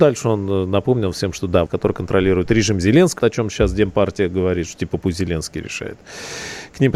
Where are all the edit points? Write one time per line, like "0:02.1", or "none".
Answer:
0:01.7
0:03.2

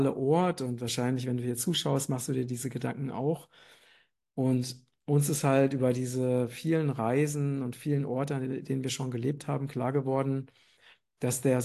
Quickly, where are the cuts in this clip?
none

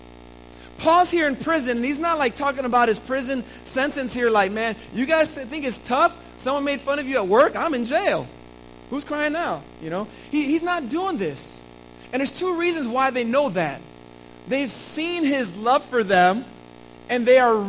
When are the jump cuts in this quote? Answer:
none

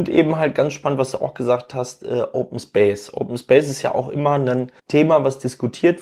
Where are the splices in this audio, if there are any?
0:04.8

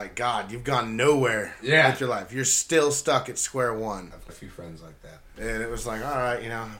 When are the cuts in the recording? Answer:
0:04.3

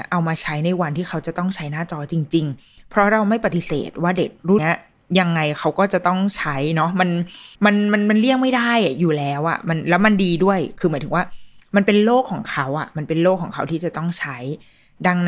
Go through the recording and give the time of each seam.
0:04.6
0:07.5

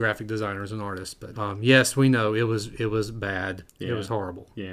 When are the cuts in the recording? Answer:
0:01.3
0:03.6

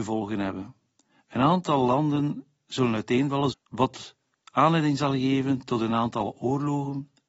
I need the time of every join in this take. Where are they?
0:03.5

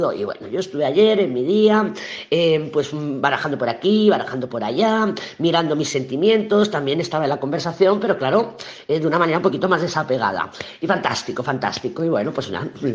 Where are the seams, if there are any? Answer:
none

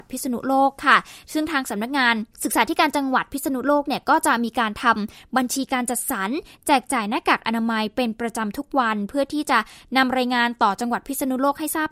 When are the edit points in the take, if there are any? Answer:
0:02.3

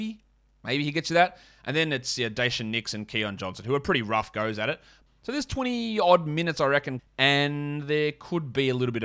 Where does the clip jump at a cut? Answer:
0:05.1
0:07.0

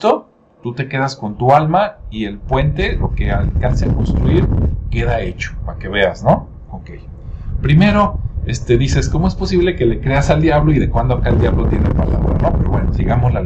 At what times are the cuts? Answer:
none

